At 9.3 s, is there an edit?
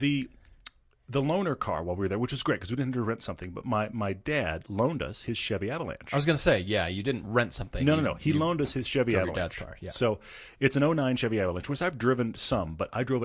no; 0 cuts

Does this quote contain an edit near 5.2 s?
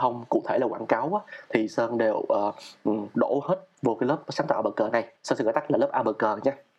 yes; 1 cut; at 5.2 s

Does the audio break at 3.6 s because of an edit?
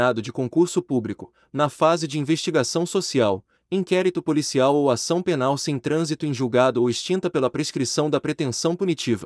yes; 1 cut; at 3.6 s

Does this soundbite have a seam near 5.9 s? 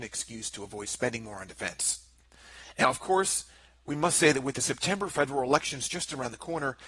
no; 0 cuts

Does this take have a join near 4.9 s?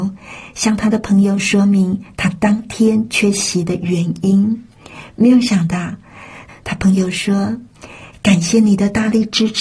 no; 1 cut; at 6.5 s

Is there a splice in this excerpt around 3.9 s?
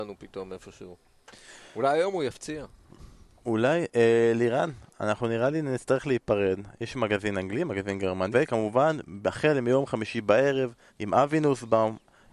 no; 2 cuts; at 8.3 s, 10.9 s

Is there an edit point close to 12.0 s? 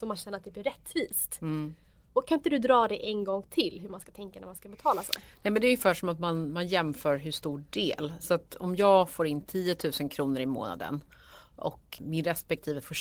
yes; 1 cut; at 12.0 s

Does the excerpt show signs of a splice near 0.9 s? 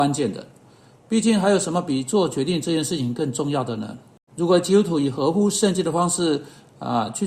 no; 1 cut; at 4.3 s

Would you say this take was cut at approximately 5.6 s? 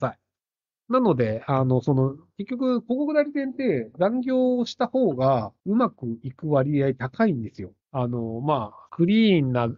yes; 3 cuts; at 5.6 s, 7.8 s, 8.9 s

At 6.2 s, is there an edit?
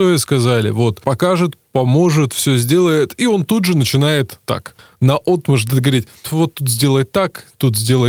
yes; 1 cut; at 6.2 s

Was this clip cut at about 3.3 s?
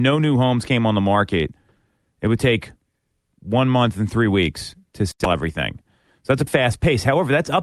no; 1 cut; at 6.5 s

